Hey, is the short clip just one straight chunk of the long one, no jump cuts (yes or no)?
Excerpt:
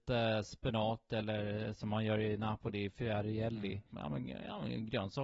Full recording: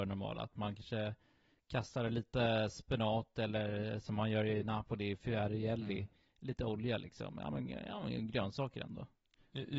no